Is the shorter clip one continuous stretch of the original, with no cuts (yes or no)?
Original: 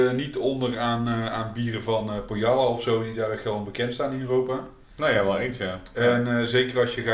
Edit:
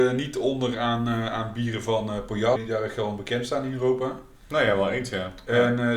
no